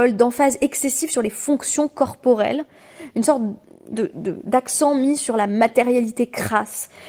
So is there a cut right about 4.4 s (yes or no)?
no